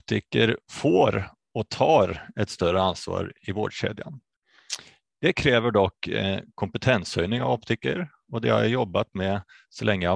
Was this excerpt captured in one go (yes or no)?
yes